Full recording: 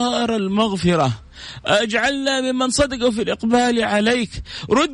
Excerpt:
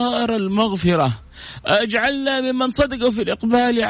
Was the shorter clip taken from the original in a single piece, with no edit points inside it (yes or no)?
yes